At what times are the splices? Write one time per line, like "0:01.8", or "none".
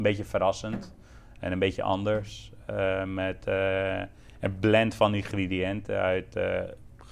none